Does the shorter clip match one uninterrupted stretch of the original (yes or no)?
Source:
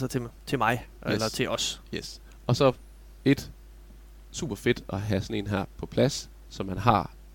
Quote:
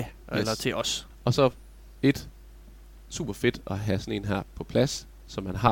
no